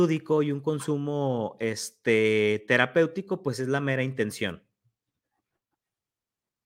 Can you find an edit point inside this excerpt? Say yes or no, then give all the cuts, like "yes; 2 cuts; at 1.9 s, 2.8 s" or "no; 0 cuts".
no; 0 cuts